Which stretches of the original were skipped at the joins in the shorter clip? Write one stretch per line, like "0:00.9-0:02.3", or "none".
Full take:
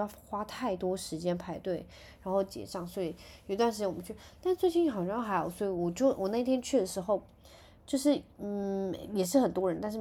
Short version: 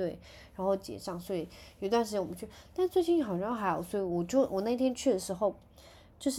none